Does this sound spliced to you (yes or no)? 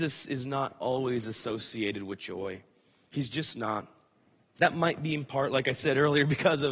no